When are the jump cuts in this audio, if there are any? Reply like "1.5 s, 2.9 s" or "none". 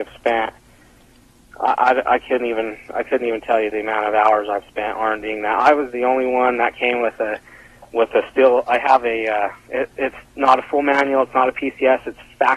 none